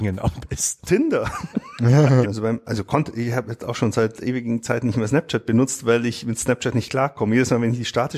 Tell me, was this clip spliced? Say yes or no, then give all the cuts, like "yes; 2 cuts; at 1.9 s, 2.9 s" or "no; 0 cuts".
yes; 1 cut; at 2.2 s